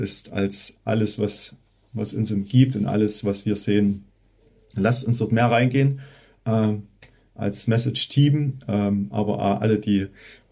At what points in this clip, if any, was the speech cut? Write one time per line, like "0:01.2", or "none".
none